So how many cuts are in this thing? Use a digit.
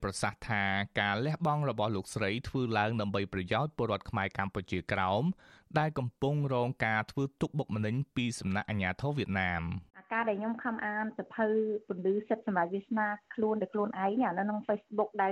1